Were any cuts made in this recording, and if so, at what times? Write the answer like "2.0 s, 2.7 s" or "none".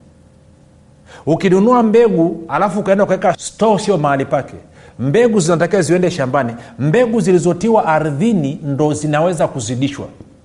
3.3 s